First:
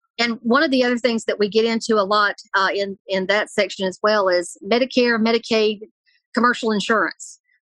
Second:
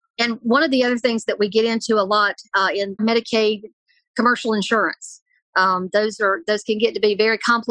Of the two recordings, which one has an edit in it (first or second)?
second